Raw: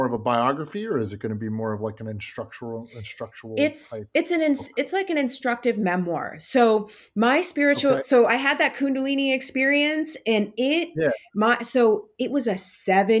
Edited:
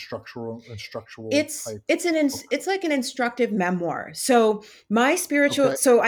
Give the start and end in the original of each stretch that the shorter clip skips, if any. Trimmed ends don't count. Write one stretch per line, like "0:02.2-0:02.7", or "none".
none